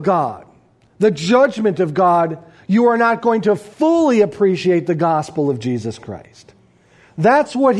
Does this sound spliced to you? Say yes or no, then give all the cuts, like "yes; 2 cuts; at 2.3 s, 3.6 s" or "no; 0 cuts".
no; 0 cuts